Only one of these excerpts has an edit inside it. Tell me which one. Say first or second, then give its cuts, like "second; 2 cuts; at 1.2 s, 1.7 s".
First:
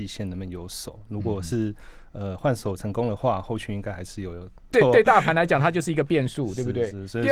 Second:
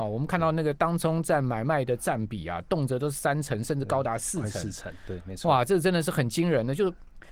first; 1 cut; at 4.7 s